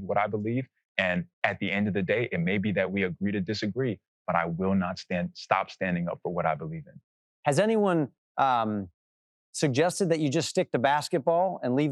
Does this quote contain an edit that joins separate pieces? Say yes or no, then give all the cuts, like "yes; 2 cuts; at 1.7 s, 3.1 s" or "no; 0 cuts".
yes; 1 cut; at 7.3 s